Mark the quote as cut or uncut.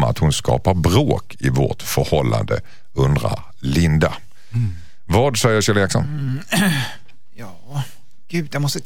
uncut